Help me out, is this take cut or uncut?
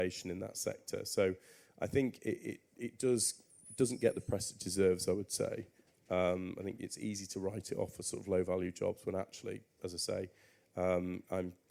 uncut